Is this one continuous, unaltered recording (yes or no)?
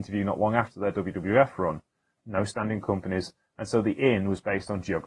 no